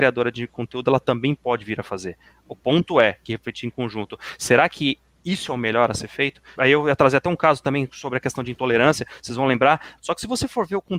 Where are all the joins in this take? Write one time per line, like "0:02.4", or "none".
0:03.2
0:06.6
0:10.0

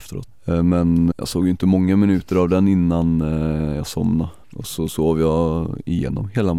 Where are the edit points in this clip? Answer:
0:01.1

